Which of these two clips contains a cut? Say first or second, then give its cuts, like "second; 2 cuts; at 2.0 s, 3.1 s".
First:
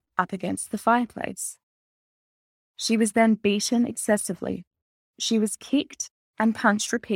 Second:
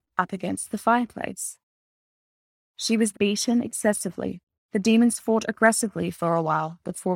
second; 2 cuts; at 3.1 s, 4.6 s